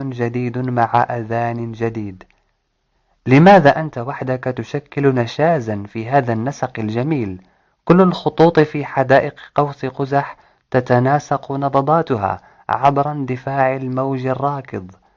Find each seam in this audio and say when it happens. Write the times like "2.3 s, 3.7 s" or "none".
none